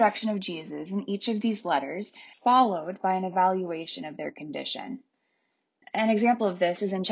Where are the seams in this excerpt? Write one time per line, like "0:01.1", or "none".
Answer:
0:02.3
0:05.8